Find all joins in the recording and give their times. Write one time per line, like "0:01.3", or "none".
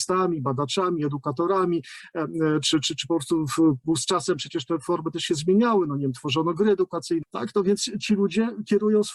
0:07.2